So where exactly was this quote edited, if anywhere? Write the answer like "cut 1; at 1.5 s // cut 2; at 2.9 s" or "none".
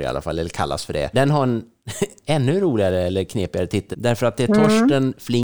cut 1; at 1.1 s // cut 2; at 3.9 s